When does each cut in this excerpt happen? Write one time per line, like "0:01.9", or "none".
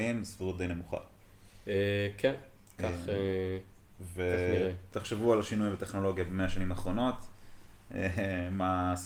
0:04.9